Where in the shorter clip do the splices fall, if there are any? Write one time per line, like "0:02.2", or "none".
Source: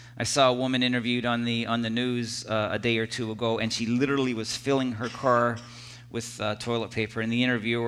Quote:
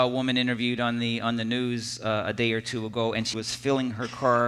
0:03.3